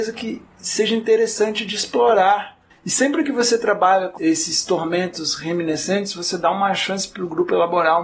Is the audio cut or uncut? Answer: cut